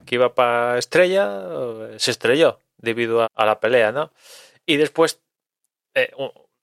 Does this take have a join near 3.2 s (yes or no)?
yes